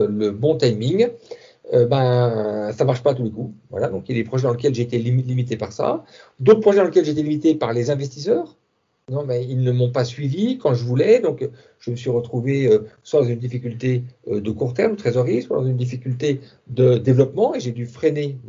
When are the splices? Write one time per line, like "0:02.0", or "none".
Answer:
none

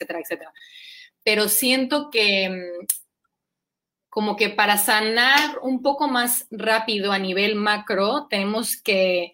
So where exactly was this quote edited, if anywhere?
none

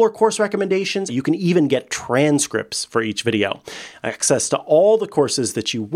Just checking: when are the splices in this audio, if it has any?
0:01.1

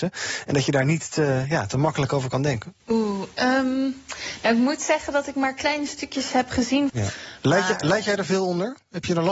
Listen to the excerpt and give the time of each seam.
0:02.8
0:06.9

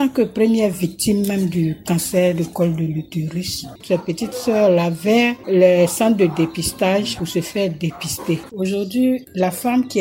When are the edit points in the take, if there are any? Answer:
0:03.8
0:08.5

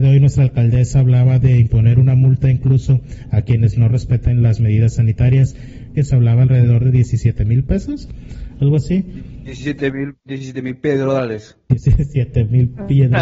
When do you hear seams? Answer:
0:06.0

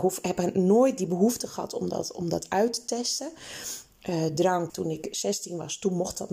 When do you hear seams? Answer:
0:04.7

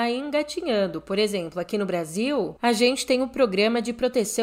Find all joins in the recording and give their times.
none

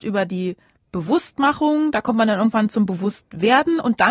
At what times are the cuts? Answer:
none

